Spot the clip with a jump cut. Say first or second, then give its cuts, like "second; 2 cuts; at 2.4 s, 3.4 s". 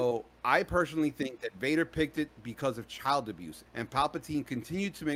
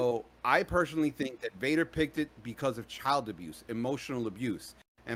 first; 1 cut; at 3.6 s